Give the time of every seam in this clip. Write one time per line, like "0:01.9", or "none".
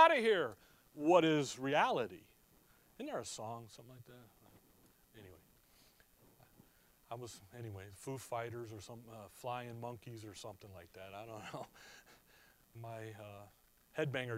0:12.7